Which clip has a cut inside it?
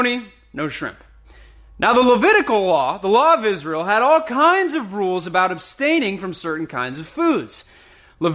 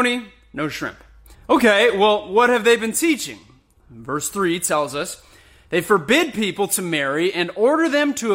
second; 1 cut; at 1.3 s

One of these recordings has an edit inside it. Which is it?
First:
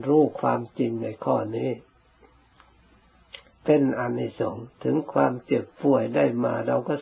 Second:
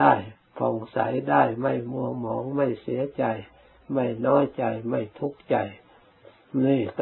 first; 1 cut; at 4.7 s

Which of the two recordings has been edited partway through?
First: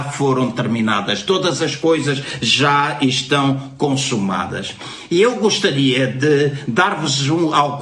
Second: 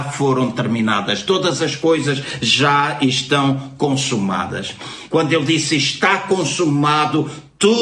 second; 1 cut; at 5.1 s

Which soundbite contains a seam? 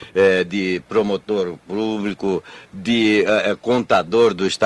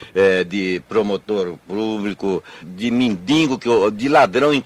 second; 1 cut; at 2.6 s

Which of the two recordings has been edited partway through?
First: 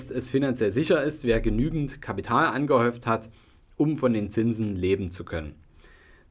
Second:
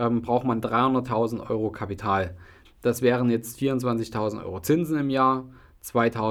second; 1 cut; at 2.6 s

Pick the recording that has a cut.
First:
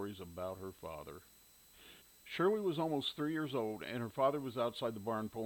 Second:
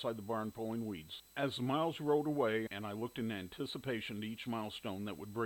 second; 2 cuts; at 1.2 s, 2.7 s

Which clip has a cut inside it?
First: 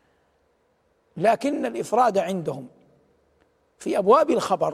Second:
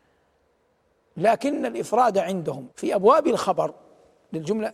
second; 1 cut; at 2.7 s

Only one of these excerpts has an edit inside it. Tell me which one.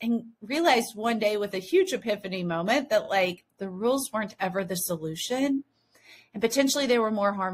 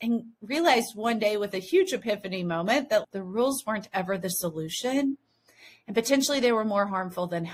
second; 1 cut; at 3.0 s

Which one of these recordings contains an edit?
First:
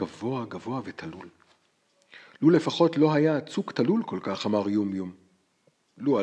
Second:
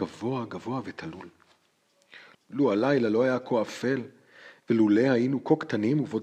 second; 2 cuts; at 2.3 s, 4.6 s

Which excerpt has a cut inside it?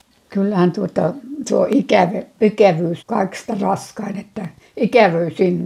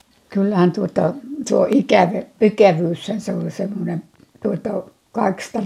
first; 1 cut; at 3.0 s

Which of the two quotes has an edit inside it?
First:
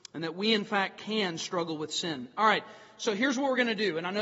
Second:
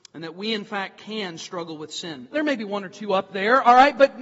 second; 1 cut; at 2.3 s

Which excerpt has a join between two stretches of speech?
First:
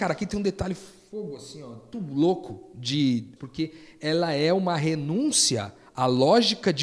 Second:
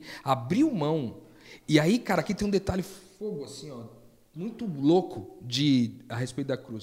first; 2 cuts; at 1.9 s, 3.4 s

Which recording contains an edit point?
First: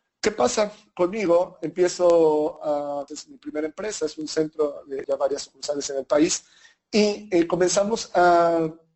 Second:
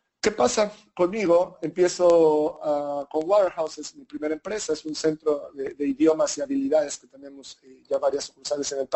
first; 2 cuts; at 3.1 s, 5.0 s

